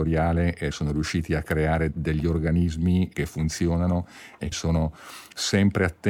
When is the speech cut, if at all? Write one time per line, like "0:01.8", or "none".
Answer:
0:04.5